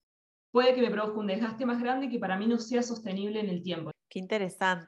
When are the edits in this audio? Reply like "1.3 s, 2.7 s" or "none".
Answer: 3.9 s

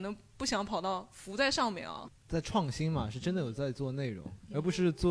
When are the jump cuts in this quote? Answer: 2.1 s

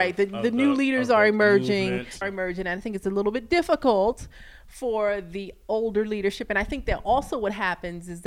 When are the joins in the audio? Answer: 2.2 s

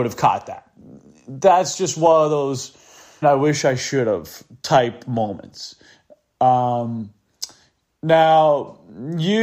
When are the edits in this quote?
3.2 s

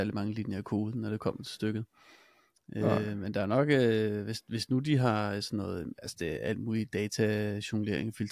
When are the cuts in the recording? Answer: none

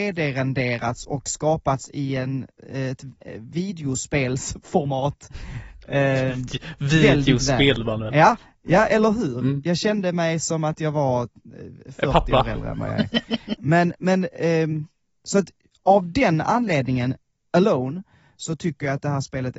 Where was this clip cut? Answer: 13.5 s

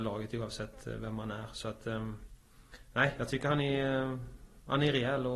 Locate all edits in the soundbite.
none

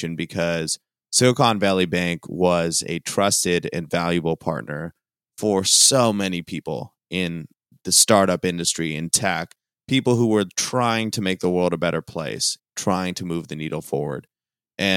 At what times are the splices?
12.6 s

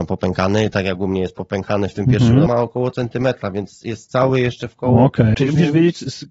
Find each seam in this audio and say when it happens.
2.5 s, 5.3 s

